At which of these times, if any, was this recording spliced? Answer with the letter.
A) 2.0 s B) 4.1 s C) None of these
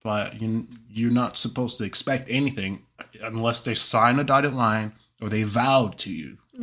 C